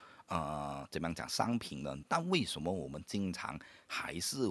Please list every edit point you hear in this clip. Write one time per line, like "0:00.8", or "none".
0:02.0